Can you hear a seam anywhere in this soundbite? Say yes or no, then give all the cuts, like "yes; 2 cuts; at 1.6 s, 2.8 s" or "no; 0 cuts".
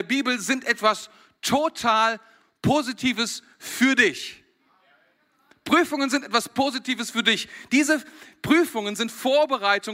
no; 0 cuts